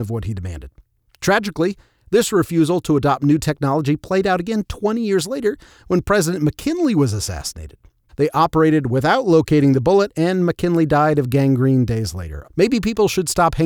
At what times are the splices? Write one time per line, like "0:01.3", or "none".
0:08.1
0:12.4